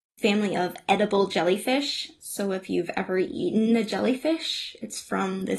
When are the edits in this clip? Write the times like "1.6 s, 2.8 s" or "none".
none

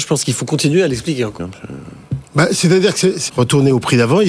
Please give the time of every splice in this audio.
1.4 s, 3.3 s

